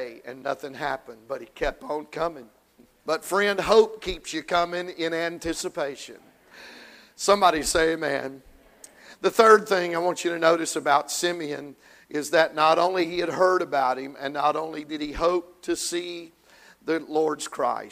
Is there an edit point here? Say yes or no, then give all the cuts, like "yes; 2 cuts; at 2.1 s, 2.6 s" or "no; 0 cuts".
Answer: yes; 2 cuts; at 3.0 s, 6.5 s